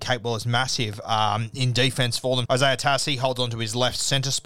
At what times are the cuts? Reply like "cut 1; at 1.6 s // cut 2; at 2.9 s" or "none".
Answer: cut 1; at 2.4 s